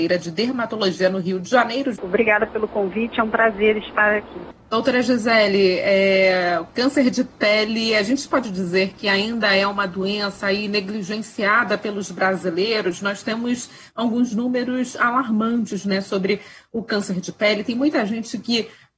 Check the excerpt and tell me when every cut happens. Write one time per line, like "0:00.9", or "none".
0:01.9

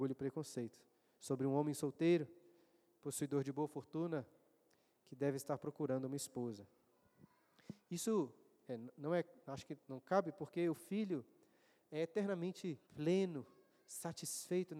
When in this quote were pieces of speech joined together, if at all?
0:09.8
0:12.8

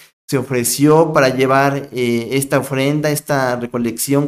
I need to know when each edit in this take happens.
none

